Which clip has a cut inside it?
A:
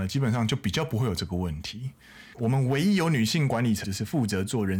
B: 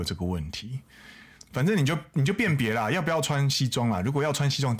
A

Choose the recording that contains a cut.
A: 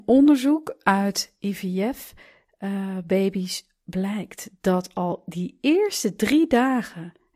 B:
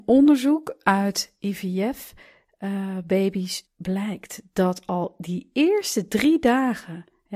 B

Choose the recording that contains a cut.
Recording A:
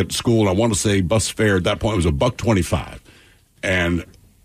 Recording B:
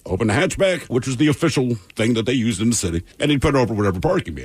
B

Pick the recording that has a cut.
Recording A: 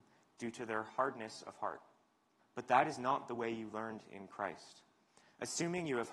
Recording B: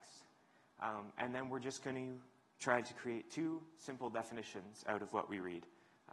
A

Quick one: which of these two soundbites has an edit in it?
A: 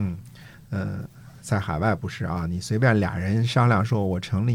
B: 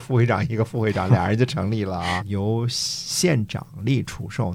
B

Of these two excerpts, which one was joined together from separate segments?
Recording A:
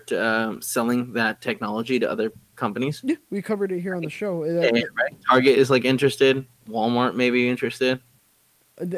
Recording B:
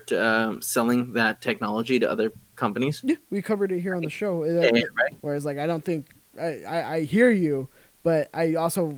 B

